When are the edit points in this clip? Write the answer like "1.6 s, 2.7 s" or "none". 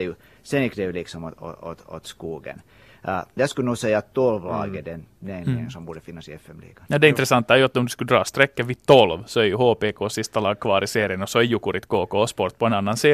3.4 s